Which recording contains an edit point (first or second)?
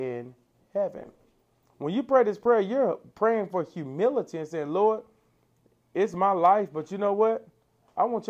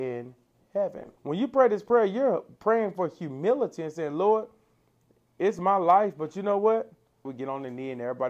second